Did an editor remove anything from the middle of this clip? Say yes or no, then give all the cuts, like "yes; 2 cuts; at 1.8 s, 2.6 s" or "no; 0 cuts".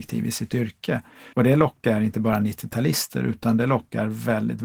yes; 1 cut; at 1.3 s